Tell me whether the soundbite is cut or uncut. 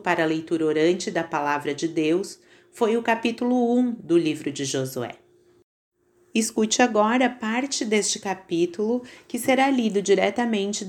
uncut